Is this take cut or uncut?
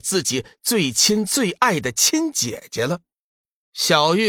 uncut